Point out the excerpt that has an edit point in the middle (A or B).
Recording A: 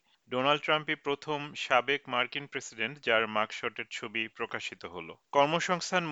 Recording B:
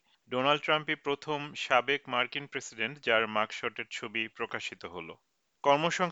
A